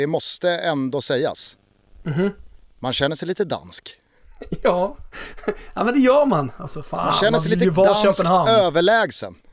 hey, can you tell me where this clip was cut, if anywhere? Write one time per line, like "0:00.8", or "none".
none